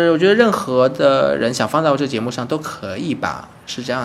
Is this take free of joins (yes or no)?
yes